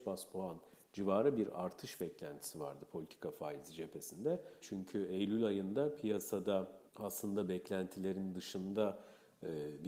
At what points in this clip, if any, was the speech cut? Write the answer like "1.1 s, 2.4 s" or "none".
4.6 s, 6.9 s